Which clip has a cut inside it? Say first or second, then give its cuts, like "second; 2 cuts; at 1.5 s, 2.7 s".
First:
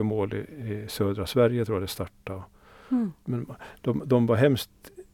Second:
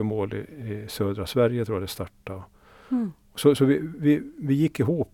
first; 1 cut; at 3.2 s